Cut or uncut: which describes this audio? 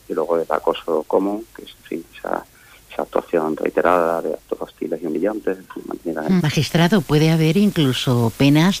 cut